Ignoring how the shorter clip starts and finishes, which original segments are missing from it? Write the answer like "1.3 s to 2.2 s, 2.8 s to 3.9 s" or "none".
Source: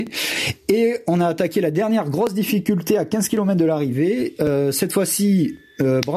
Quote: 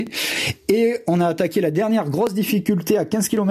none